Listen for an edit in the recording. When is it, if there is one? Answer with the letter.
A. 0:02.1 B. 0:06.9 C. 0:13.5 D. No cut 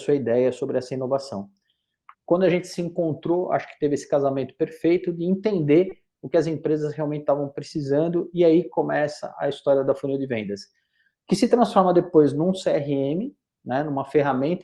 A